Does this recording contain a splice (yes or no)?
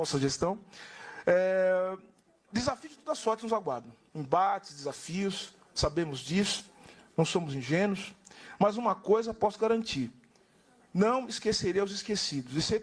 no